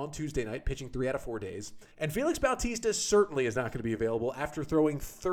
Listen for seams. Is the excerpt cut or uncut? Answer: cut